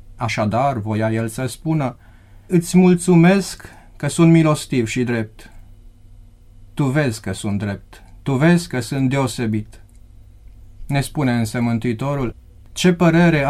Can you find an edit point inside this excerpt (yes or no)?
yes